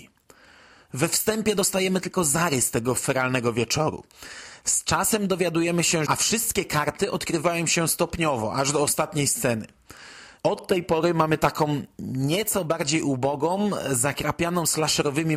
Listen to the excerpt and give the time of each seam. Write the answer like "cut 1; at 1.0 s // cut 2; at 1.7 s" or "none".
cut 1; at 6.1 s // cut 2; at 10.4 s